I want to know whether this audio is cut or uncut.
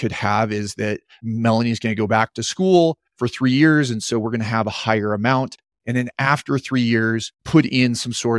cut